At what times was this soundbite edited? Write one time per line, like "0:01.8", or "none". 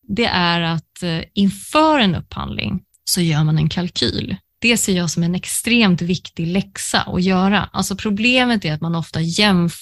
0:04.5